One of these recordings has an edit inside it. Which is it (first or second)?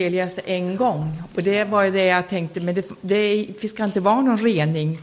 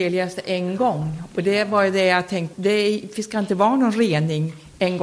second